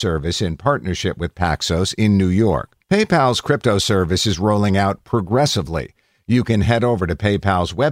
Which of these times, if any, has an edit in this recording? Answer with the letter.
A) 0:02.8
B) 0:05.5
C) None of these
A